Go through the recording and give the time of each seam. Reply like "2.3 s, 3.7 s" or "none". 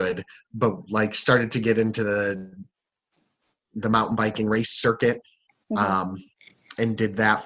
none

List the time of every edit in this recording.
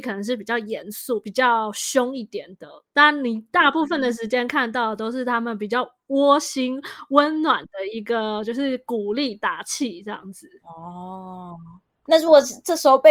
none

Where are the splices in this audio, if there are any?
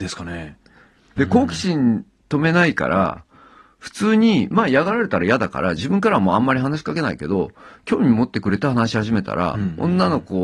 1.2 s

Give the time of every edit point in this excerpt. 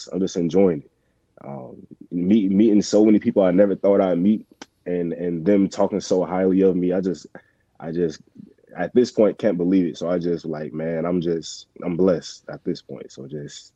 none

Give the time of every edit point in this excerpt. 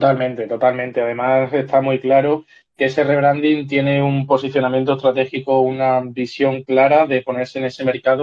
none

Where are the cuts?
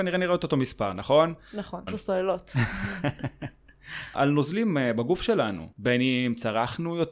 1.9 s, 4.1 s, 5.7 s

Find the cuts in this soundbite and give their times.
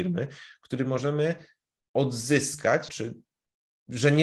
2.9 s

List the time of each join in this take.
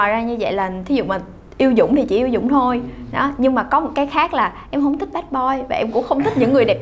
none

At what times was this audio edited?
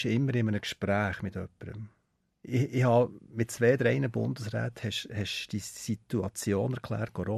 none

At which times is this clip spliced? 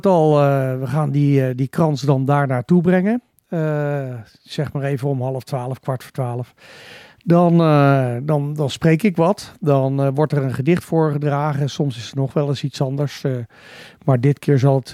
none

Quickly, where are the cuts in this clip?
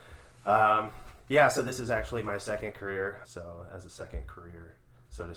3.2 s

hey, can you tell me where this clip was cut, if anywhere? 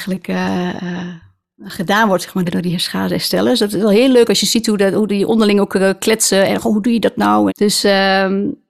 2.5 s, 7.5 s

